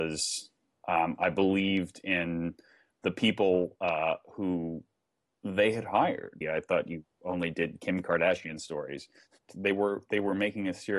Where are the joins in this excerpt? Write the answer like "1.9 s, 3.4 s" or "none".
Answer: 6.4 s, 9.5 s